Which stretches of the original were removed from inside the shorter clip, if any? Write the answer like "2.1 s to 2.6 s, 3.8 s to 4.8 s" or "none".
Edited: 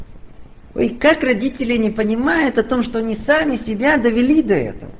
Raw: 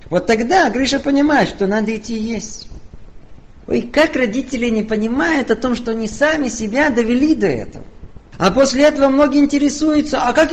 none